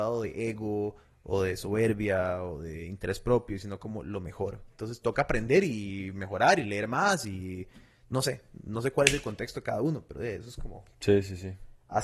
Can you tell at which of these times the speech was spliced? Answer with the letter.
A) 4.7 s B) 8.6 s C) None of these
A